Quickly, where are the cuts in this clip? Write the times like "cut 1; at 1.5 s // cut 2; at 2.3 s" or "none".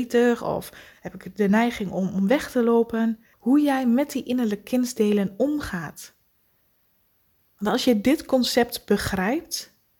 cut 1; at 3.3 s